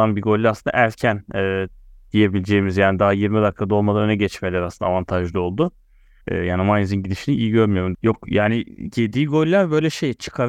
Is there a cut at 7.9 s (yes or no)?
yes